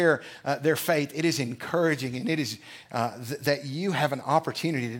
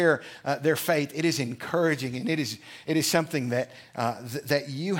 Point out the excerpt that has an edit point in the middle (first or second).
first